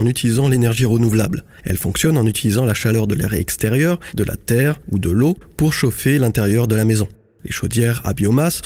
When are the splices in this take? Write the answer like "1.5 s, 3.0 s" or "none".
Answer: none